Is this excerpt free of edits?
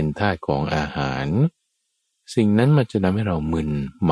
yes; 0 cuts

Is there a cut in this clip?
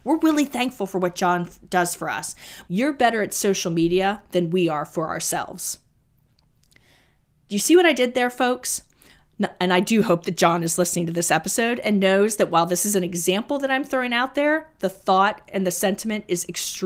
yes; 1 cut; at 2.7 s

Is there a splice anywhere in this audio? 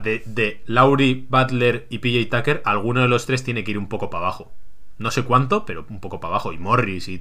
no; 0 cuts

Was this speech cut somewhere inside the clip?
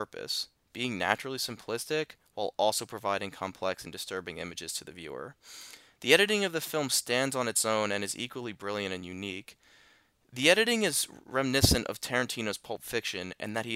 no; 0 cuts

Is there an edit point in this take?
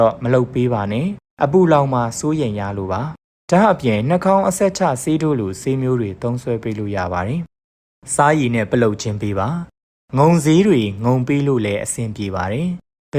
no; 0 cuts

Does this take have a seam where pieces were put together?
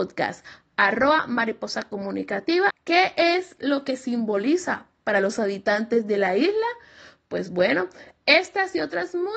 yes; 1 cut; at 2.7 s

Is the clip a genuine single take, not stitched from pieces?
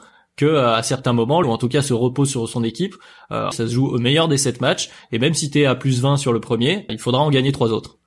no; 3 cuts; at 1.4 s, 3.5 s, 6.9 s

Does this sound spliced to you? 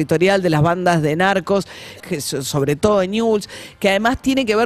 yes; 1 cut; at 2.0 s

